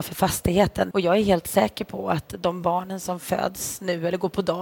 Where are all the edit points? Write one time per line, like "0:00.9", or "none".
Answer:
0:00.9